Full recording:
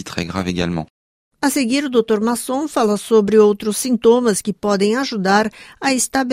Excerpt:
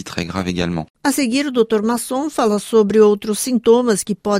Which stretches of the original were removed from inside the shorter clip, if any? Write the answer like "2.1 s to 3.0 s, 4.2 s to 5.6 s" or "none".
0.9 s to 1.3 s